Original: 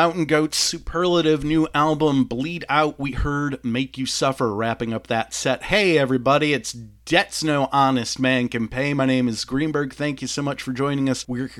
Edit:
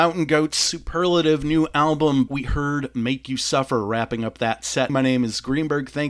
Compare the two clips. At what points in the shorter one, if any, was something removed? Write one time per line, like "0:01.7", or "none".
0:02.3
0:04.9